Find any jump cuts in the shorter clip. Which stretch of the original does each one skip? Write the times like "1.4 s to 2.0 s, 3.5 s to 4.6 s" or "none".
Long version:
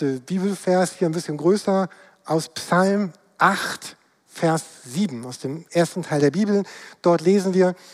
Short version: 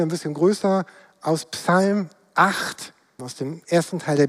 4.2 s to 5.2 s